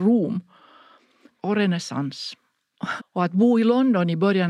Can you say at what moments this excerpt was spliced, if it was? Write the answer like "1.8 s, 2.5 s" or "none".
1.3 s, 3.0 s